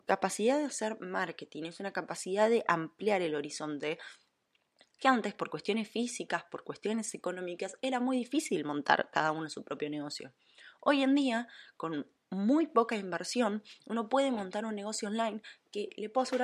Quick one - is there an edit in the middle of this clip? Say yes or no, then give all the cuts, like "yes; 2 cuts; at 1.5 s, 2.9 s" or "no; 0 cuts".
no; 0 cuts